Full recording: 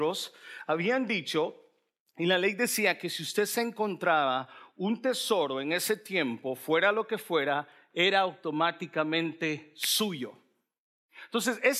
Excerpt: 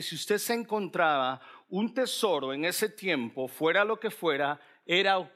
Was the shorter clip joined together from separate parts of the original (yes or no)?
no